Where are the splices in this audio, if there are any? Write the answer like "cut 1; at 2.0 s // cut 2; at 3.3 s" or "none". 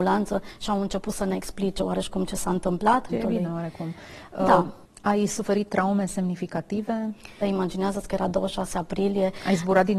cut 1; at 3.1 s // cut 2; at 7.4 s